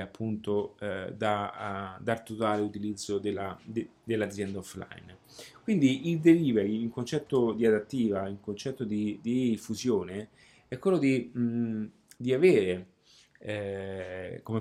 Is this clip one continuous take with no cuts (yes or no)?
yes